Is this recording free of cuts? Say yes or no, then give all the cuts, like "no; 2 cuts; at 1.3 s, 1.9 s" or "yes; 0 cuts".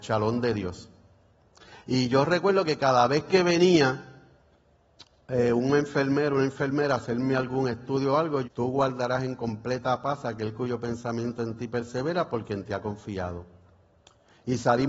no; 1 cut; at 8.4 s